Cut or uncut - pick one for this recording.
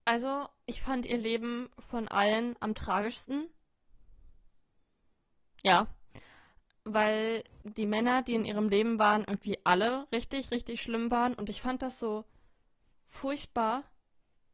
uncut